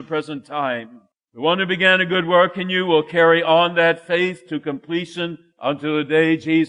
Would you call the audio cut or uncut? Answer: cut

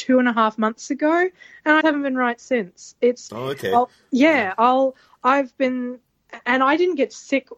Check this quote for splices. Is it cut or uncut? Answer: cut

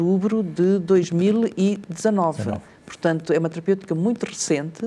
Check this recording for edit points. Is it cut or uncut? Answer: uncut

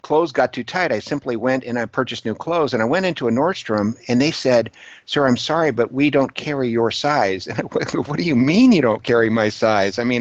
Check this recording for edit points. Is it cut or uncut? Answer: uncut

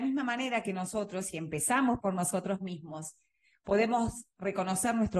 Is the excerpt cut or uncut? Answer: uncut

